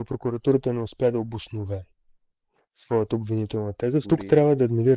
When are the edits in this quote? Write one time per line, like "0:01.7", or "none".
0:04.0